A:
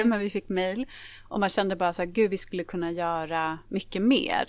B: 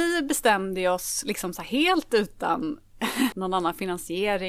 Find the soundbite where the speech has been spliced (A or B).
B